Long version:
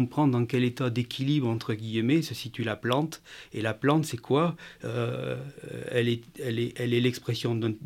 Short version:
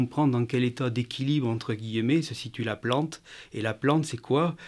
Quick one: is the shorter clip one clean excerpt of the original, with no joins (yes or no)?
yes